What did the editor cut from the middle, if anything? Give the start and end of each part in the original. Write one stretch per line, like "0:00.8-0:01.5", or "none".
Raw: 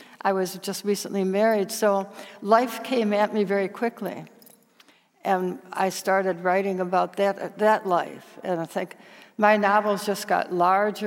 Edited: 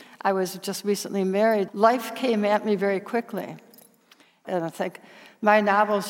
0:01.7-0:02.4
0:05.1-0:08.4